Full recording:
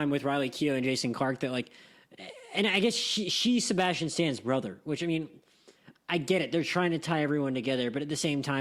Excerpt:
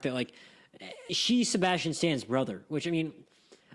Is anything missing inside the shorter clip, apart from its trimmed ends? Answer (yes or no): yes